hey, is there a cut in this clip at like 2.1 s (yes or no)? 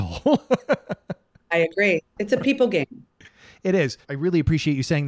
no